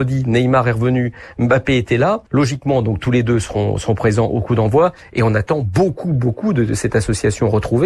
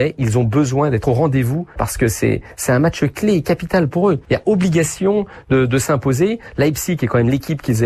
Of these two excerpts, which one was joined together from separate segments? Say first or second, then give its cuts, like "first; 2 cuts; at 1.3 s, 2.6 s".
first; 1 cut; at 2.3 s